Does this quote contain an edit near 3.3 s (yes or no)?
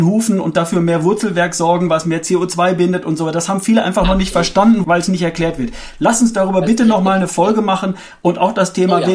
no